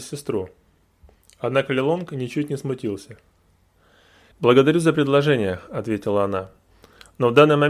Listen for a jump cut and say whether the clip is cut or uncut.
cut